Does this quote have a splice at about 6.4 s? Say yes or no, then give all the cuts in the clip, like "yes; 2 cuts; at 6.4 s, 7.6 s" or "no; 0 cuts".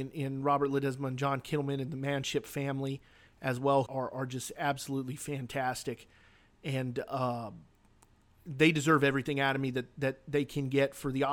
no; 1 cut; at 3.9 s